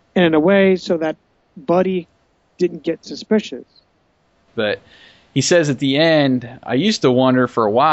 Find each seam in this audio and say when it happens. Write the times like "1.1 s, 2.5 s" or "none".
4.5 s